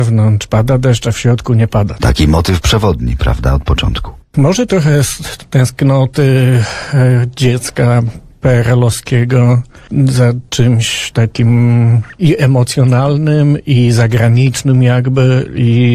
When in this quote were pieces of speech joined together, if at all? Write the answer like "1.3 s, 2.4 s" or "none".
2.0 s